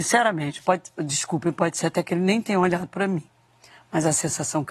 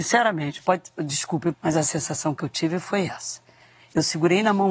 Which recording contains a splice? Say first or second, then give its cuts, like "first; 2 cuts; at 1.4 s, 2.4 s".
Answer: second; 1 cut; at 1.5 s